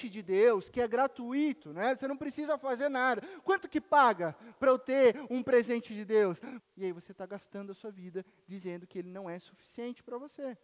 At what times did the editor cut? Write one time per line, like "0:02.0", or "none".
0:06.6